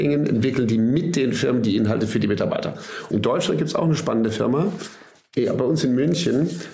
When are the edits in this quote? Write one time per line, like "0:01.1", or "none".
0:03.1

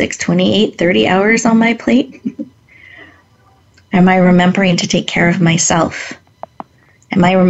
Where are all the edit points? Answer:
none

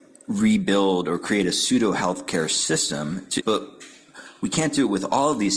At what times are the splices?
0:03.4

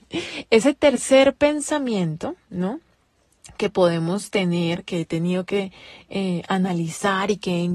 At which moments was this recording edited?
none

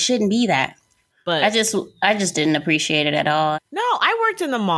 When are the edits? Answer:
0:01.1
0:03.5

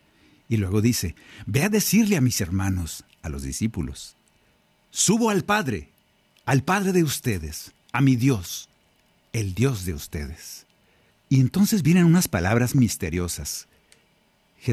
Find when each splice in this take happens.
0:11.1
0:12.7

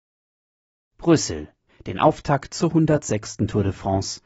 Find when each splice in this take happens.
0:01.7

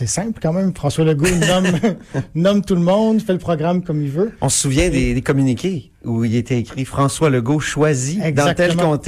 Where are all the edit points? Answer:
none

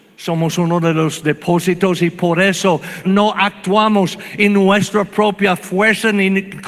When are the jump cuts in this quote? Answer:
0:03.0

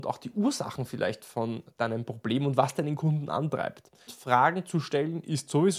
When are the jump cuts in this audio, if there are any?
0:04.1

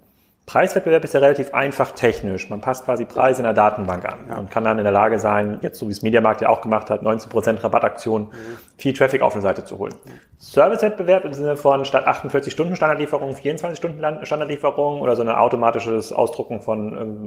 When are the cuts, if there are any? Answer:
0:05.6
0:07.0

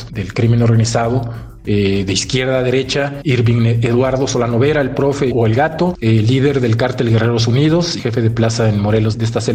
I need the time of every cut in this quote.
none

